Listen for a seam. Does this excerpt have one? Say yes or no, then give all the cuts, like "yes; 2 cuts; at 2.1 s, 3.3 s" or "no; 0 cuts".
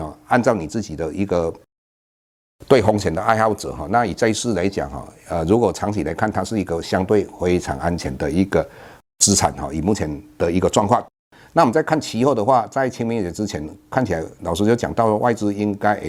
no; 0 cuts